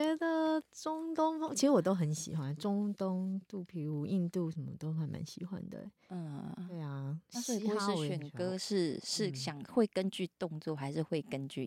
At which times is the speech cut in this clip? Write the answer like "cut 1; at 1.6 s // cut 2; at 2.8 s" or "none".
none

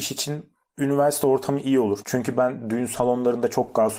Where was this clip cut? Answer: cut 1; at 2.0 s

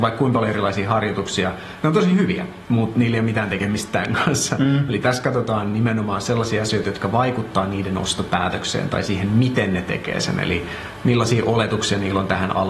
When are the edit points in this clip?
none

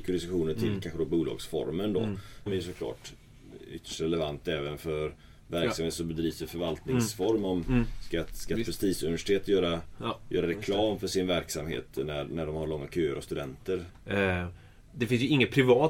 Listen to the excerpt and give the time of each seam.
cut 1; at 2.5 s // cut 2; at 13.9 s

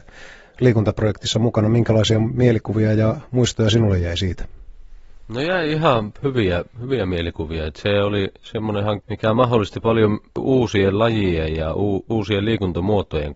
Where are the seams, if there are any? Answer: cut 1; at 9.0 s

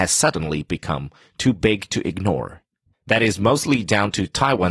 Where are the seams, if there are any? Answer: cut 1; at 2.9 s

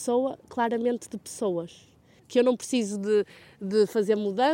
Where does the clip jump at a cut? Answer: cut 1; at 2.2 s

